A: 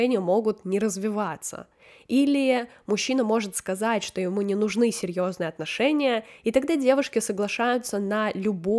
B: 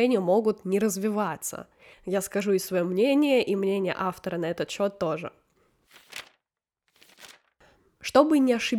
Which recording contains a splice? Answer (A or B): B